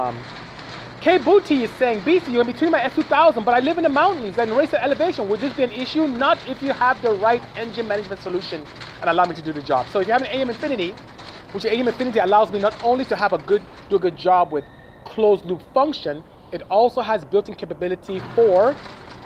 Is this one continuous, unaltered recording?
yes; 0 cuts

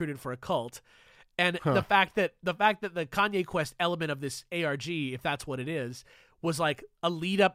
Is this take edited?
no; 0 cuts

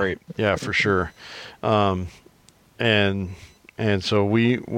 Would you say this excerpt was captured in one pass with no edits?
yes; 0 cuts

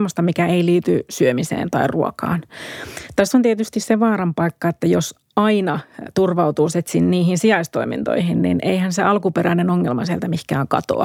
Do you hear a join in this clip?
no; 0 cuts

